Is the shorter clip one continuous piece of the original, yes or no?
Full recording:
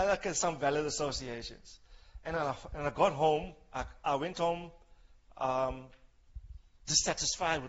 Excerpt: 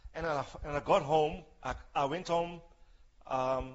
yes